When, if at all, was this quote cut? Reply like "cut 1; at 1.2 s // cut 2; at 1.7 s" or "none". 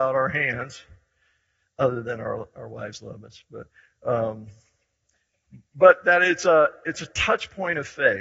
none